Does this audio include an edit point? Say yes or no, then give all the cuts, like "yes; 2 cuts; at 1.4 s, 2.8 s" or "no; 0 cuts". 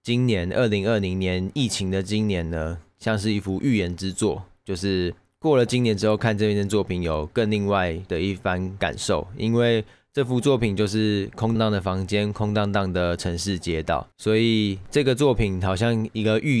yes; 2 cuts; at 11.6 s, 14.1 s